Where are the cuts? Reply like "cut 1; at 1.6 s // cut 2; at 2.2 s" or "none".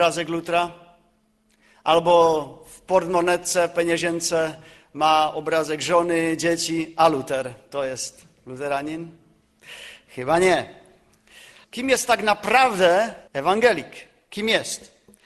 cut 1; at 11.6 s // cut 2; at 13.3 s